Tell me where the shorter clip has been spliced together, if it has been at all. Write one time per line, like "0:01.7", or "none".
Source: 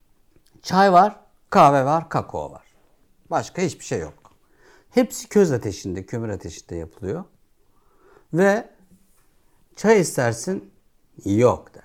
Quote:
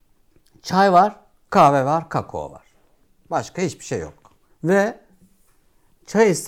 0:04.5